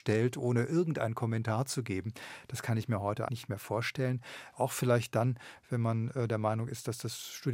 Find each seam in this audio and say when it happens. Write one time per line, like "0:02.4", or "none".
0:03.3
0:04.5